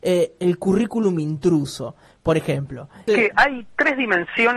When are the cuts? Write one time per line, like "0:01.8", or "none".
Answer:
0:03.1

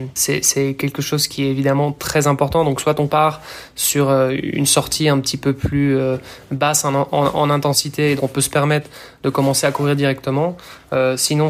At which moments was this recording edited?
0:08.2

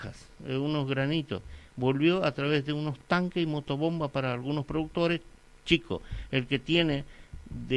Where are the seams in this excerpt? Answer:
none

